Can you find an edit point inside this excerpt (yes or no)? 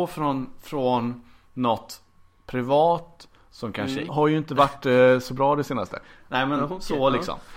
yes